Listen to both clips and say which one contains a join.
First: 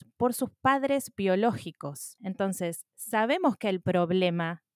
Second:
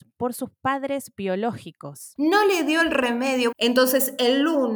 second; 2 cuts; at 2.2 s, 3.5 s

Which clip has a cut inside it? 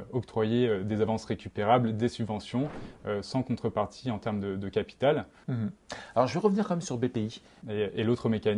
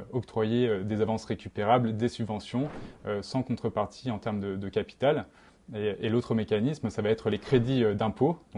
first; 2 cuts; at 5.4 s, 7.6 s

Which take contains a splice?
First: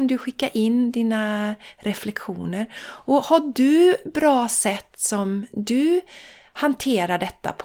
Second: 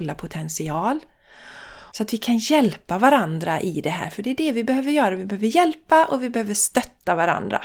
second; 1 cut; at 1.9 s

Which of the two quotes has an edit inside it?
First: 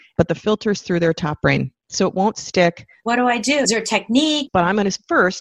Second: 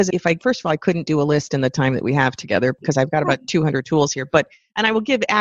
first; 2 cuts; at 3.0 s, 4.5 s

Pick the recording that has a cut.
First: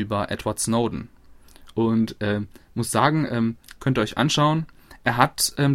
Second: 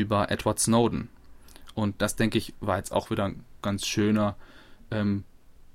first; 2 cuts; at 1.7 s, 3.8 s

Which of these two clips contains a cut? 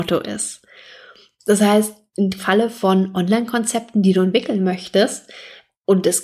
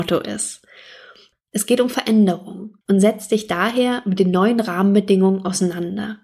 second; 2 cuts; at 1.3 s, 2.8 s

